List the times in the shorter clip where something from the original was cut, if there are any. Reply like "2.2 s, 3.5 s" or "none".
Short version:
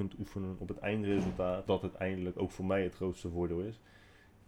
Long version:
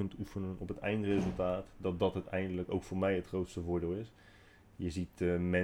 1.7 s